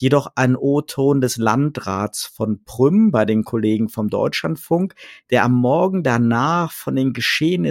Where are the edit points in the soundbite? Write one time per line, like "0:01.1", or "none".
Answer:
none